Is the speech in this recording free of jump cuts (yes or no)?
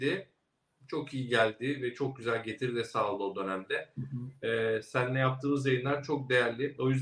yes